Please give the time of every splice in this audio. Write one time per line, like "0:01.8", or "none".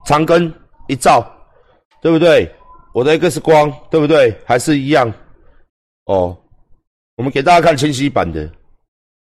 none